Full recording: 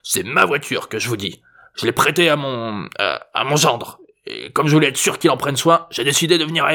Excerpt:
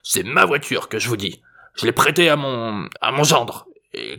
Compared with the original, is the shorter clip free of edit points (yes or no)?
no